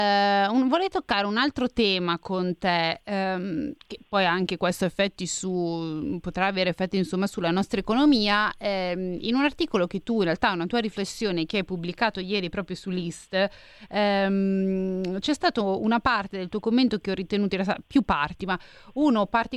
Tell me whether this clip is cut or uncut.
cut